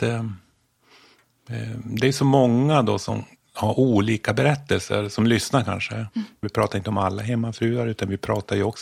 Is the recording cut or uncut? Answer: cut